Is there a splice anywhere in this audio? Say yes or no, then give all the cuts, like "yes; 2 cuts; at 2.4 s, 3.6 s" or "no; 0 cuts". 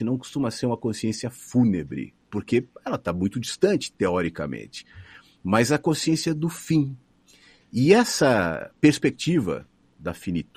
yes; 1 cut; at 2.2 s